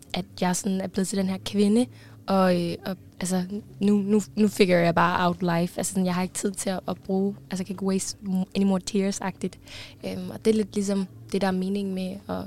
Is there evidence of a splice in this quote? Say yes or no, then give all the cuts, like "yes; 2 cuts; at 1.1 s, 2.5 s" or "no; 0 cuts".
no; 0 cuts